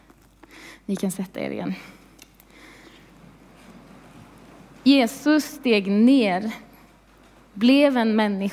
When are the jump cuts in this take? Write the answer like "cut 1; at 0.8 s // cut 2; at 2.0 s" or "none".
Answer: none

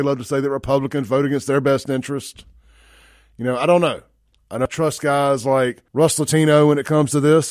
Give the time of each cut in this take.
cut 1; at 4.7 s // cut 2; at 5.9 s

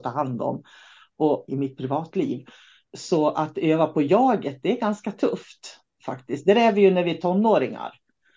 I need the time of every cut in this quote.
cut 1; at 1.5 s

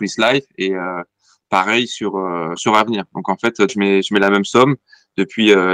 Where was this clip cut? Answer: cut 1; at 2.6 s // cut 2; at 3.7 s

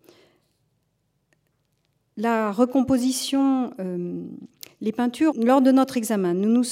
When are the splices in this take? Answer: cut 1; at 5.3 s

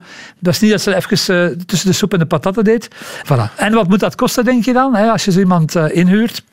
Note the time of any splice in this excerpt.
cut 1; at 3.2 s

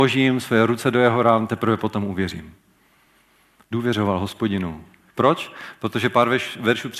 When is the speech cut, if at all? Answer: cut 1; at 3.6 s // cut 2; at 5.1 s

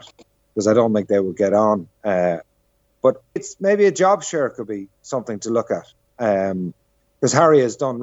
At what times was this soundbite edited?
cut 1; at 3.4 s

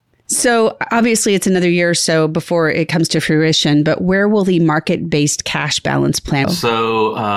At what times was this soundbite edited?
cut 1; at 6.4 s

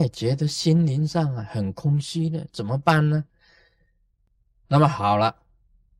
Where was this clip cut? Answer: none

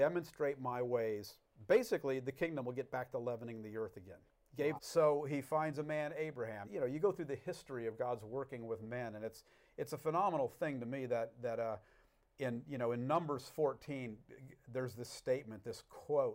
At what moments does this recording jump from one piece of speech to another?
cut 1; at 4.8 s // cut 2; at 6.6 s

